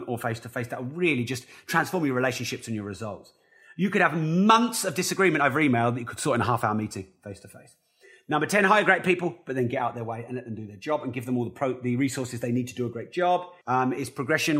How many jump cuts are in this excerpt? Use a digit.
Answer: 1